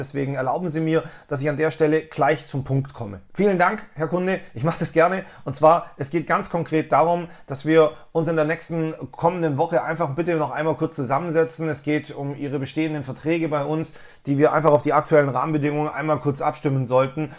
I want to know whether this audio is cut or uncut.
cut